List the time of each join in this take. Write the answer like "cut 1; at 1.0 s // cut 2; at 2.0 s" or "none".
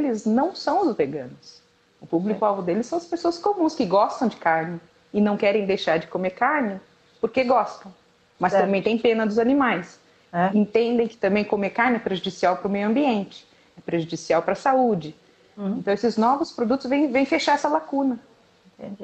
none